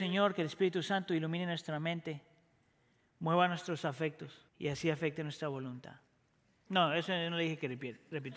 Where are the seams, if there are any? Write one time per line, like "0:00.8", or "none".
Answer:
0:04.5
0:06.7